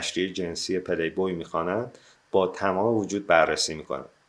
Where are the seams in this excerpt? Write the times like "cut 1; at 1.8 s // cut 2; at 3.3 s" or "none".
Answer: none